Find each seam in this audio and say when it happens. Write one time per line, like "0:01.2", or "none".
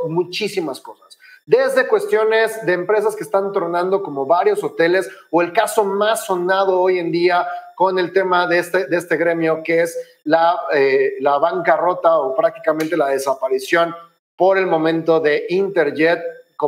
none